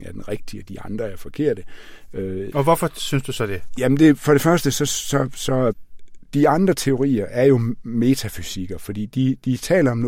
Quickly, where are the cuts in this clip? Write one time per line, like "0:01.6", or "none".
0:02.5